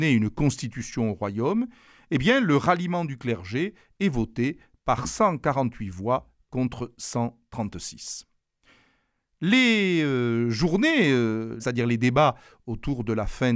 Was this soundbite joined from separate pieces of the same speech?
yes; 1 cut; at 11.6 s

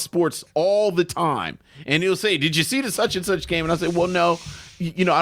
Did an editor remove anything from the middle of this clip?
no; 0 cuts

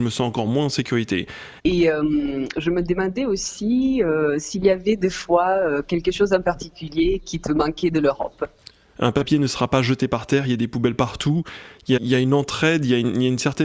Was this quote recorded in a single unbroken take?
no; 3 cuts; at 1.6 s, 8.9 s, 12.0 s

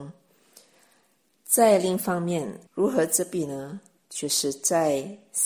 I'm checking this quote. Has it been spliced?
yes; 1 cut; at 2.7 s

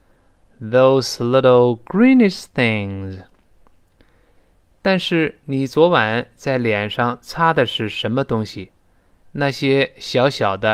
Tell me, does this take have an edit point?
no; 0 cuts

